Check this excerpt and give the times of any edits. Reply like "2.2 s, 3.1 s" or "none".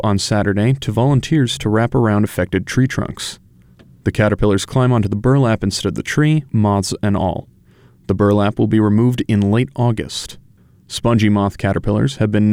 6.5 s